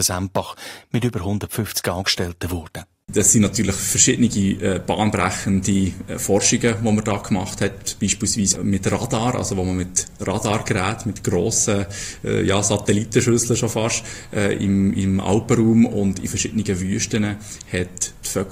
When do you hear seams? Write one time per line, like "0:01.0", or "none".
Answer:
none